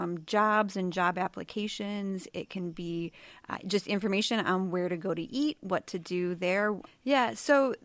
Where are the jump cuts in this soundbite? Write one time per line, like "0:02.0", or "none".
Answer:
0:06.9

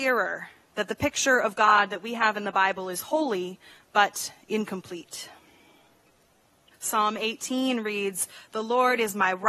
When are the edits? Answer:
0:06.7

